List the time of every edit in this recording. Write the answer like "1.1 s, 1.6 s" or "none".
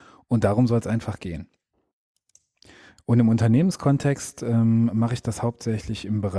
none